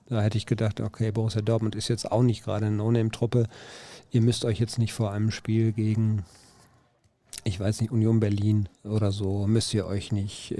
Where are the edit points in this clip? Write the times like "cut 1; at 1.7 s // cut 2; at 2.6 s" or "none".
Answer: cut 1; at 8.7 s